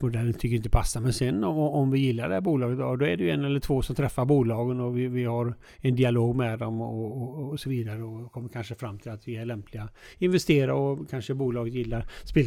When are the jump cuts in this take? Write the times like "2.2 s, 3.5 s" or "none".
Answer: none

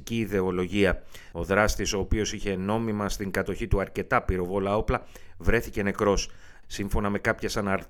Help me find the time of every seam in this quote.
1.3 s, 6.6 s

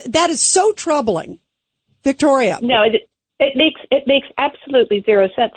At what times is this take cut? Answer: none

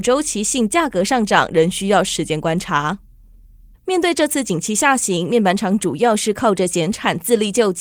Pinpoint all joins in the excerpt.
3.7 s

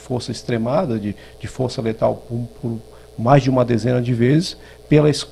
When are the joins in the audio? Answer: none

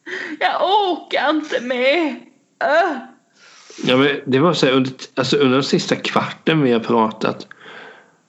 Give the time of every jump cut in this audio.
none

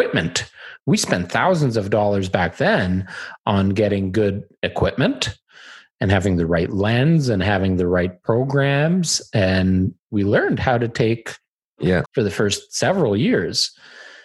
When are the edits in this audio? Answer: 12.0 s

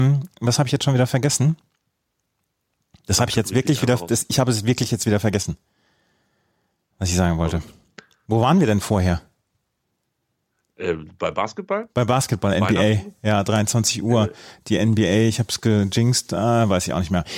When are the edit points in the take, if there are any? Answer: none

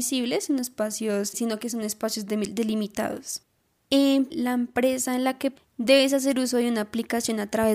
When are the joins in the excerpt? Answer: 1.3 s, 4.3 s, 5.6 s

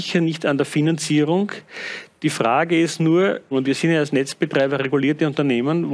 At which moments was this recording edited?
3.5 s

